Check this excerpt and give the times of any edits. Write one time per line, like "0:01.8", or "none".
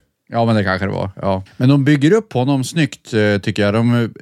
0:01.5